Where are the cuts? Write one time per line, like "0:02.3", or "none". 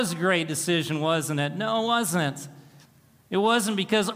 none